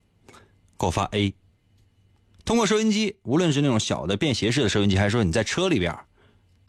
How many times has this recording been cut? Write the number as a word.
zero